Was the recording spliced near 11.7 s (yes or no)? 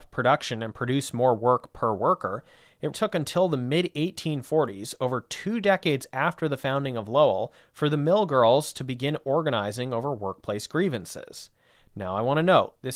no